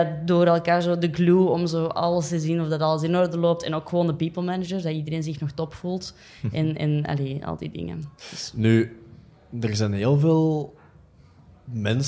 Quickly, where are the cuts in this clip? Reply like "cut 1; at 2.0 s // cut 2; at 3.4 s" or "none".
none